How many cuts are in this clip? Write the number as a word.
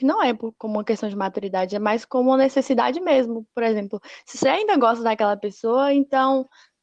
zero